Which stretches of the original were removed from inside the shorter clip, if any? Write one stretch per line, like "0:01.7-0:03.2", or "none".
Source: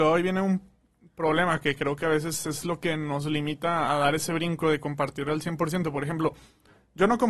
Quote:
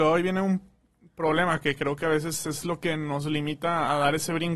none